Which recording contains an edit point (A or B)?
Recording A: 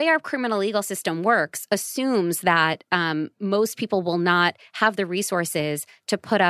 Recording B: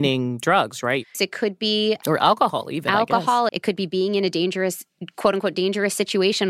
B